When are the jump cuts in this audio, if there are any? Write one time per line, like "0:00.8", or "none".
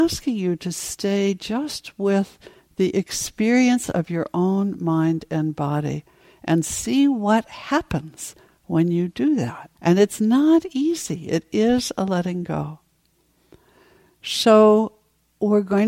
0:09.7